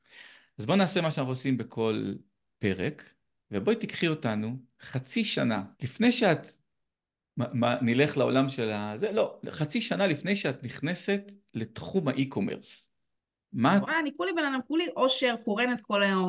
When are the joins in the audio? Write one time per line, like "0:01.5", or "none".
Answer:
0:05.7
0:13.8